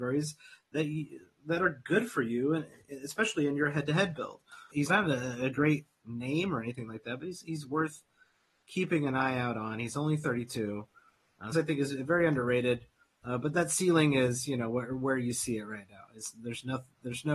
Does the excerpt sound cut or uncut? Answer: cut